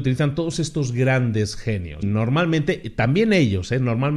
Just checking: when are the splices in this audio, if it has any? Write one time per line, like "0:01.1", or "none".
0:02.0